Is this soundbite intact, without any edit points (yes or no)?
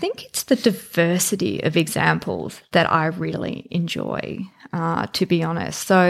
yes